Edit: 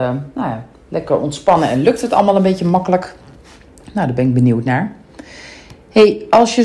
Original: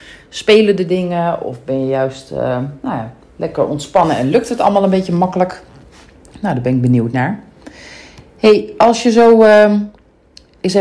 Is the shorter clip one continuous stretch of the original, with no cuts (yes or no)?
yes